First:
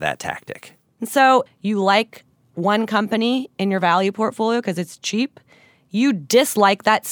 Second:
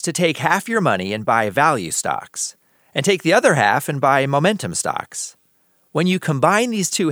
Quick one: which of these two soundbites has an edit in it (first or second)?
first